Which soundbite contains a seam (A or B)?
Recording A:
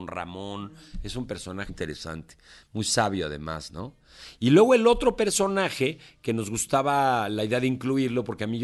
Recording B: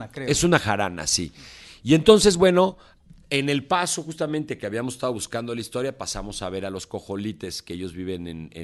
A